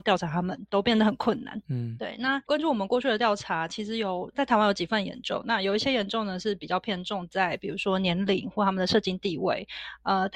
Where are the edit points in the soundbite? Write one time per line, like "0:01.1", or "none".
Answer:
none